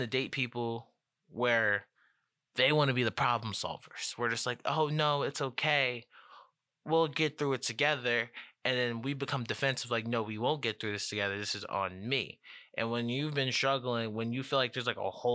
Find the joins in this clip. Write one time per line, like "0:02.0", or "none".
none